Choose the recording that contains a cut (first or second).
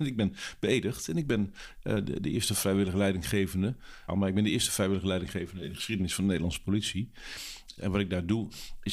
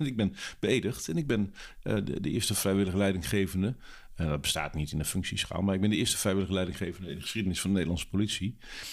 first